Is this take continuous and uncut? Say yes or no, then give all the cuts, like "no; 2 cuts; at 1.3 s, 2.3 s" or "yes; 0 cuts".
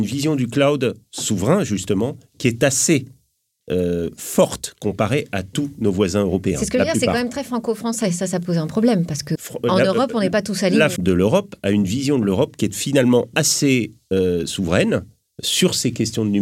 no; 2 cuts; at 9.3 s, 11.0 s